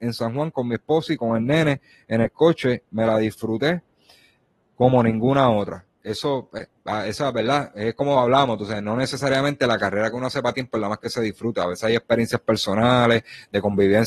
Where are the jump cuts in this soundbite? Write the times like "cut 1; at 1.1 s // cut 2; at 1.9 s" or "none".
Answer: none